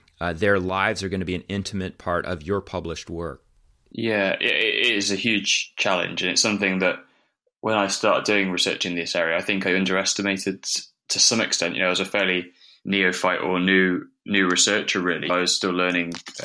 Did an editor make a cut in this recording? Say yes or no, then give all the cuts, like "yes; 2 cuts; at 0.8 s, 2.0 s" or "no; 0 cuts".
yes; 1 cut; at 15.3 s